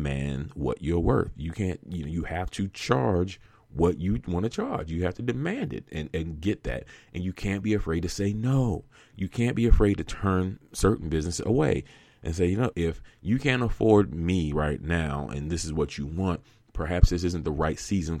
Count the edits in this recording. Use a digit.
1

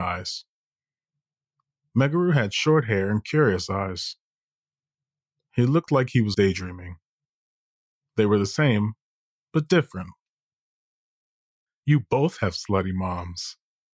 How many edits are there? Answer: 2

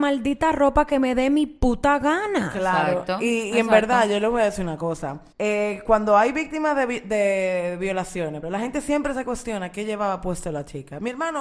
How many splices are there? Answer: 2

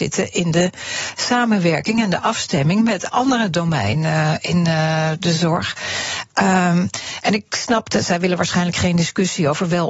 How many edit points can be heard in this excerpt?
0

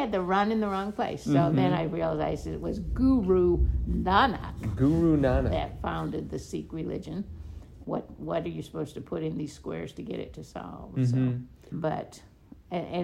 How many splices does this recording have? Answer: 2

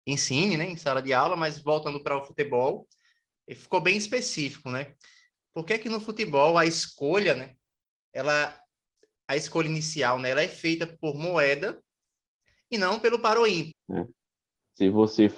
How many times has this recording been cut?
2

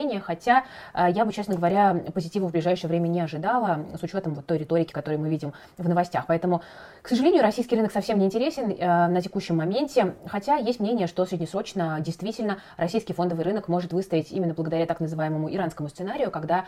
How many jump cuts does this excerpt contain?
1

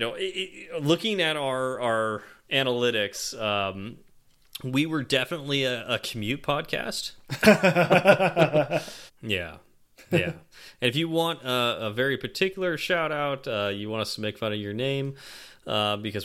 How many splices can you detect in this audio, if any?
1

